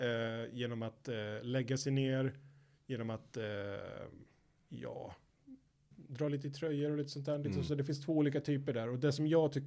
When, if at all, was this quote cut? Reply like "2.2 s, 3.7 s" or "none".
5.9 s